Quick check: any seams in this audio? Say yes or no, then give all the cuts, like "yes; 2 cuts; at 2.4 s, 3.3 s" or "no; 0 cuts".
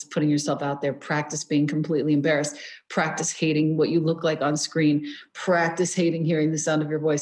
no; 0 cuts